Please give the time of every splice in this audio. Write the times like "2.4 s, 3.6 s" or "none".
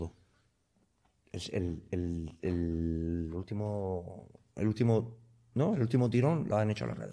none